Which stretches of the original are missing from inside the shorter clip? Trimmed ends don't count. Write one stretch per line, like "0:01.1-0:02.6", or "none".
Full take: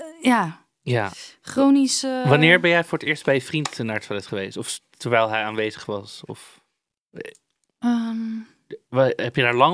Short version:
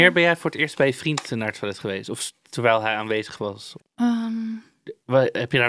0:06.3-0:07.6